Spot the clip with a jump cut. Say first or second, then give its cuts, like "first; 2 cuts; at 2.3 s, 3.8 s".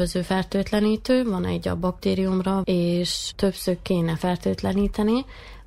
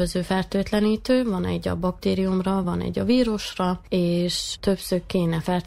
first; 1 cut; at 2.6 s